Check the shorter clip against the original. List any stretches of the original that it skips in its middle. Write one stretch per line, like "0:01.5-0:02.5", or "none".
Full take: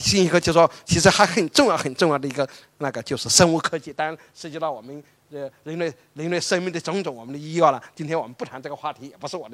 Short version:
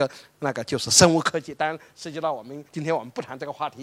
0:05.1-0:07.9